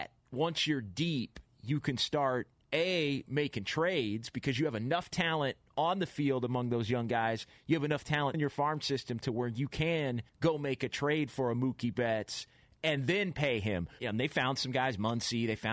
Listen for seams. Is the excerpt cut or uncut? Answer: cut